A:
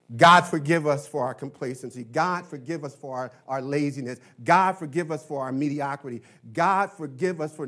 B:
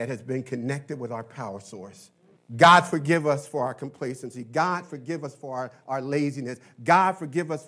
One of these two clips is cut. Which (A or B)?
B